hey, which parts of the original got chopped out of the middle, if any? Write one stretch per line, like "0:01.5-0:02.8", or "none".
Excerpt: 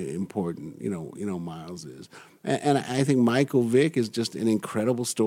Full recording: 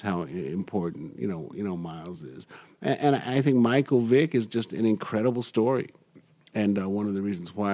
none